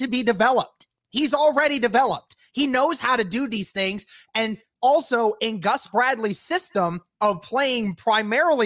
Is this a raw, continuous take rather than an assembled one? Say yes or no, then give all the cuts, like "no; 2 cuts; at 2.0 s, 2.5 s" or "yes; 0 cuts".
yes; 0 cuts